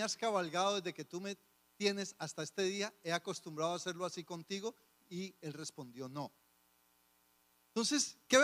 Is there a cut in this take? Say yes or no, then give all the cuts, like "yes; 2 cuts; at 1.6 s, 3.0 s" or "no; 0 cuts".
no; 0 cuts